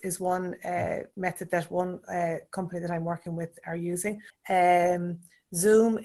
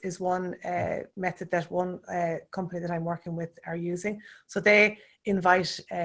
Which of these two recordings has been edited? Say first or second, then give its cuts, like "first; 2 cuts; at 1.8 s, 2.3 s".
first; 1 cut; at 4.3 s